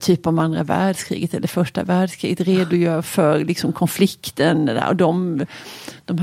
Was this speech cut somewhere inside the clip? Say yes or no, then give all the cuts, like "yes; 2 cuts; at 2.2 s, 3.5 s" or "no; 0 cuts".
no; 0 cuts